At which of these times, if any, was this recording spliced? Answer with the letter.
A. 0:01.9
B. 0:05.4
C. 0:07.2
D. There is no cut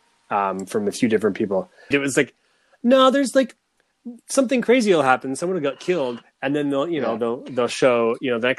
A